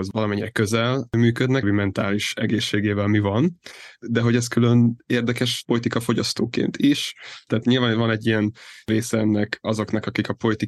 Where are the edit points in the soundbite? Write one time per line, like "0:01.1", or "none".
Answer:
0:01.6
0:07.5